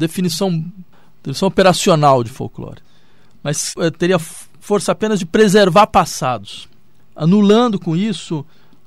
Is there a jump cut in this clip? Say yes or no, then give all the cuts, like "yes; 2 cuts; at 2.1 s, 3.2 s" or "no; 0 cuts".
no; 0 cuts